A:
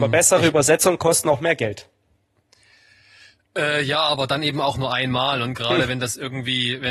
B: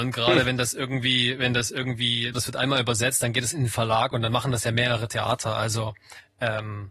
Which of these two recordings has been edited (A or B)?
B